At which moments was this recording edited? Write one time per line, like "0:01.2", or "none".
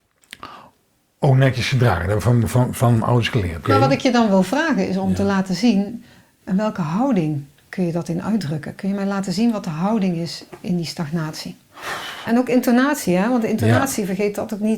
0:03.6
0:12.3